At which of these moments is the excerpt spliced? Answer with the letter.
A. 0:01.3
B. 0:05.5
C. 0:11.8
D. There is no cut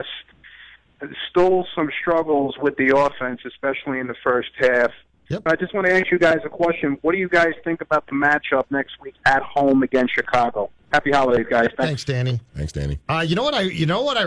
B